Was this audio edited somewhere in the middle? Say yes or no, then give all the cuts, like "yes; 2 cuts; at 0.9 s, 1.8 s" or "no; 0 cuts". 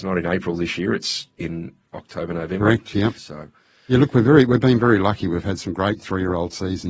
yes; 1 cut; at 3.2 s